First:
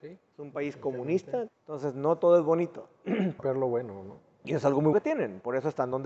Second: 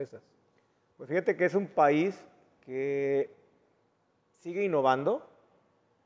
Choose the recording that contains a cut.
first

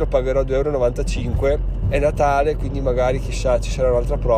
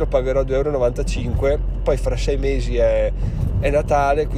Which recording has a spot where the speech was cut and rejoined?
first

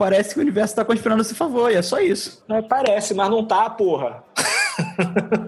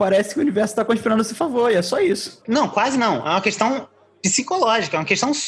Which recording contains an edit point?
second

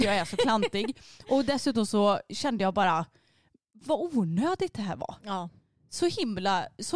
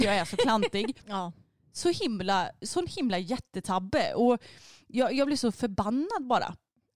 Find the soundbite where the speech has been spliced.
second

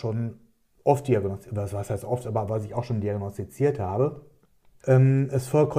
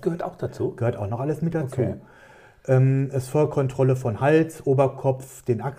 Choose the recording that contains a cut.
first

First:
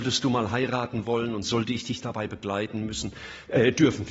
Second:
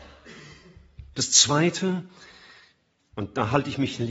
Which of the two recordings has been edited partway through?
second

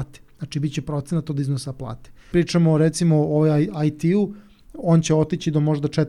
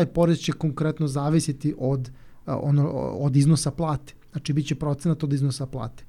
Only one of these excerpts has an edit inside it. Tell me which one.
first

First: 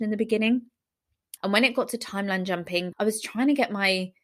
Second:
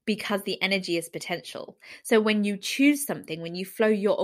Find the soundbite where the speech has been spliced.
first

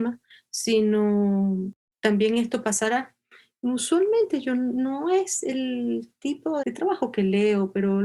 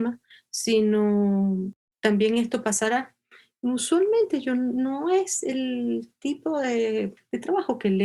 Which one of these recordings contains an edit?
first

